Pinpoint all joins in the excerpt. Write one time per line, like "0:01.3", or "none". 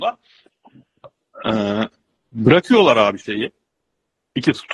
none